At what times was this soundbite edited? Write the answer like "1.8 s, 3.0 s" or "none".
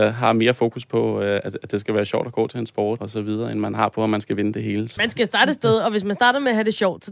3.0 s, 5.0 s